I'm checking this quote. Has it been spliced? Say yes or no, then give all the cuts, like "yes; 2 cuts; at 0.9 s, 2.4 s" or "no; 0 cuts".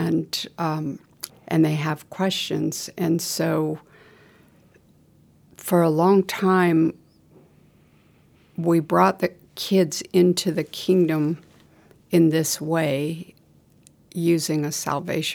yes; 1 cut; at 1.3 s